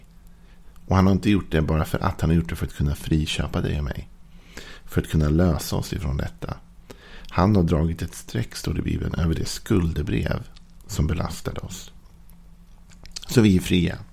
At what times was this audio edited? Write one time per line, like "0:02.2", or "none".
none

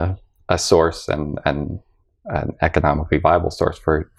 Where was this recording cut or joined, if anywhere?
none

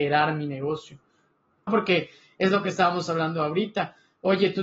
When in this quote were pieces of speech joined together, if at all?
0:01.7

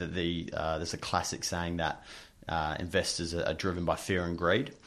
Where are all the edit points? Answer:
none

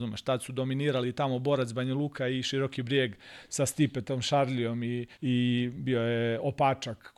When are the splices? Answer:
0:05.1

